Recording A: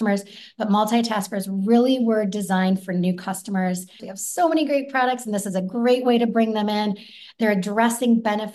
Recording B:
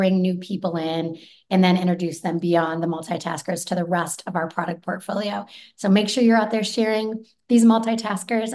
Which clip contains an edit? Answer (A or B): A